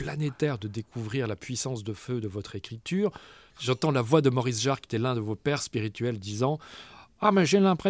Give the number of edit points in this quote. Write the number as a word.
zero